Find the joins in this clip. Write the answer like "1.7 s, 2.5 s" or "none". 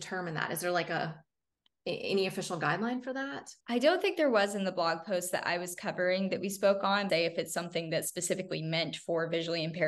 3.6 s, 7.1 s

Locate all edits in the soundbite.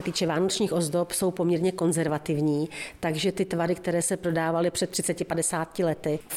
none

